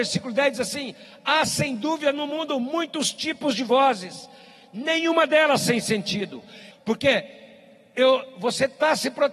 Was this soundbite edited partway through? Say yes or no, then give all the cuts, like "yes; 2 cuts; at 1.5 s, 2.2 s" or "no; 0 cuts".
yes; 1 cut; at 6.7 s